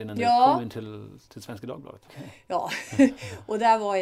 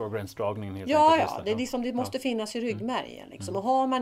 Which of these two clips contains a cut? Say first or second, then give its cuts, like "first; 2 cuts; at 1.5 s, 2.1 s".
first; 1 cut; at 2.1 s